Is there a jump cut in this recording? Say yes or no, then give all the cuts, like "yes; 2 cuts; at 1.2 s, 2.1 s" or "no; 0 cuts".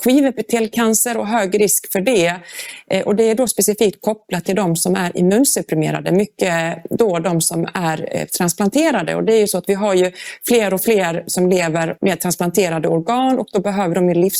no; 0 cuts